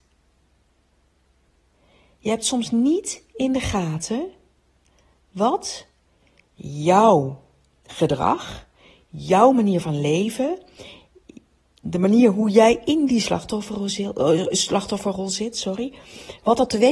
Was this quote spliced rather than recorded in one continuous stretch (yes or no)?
no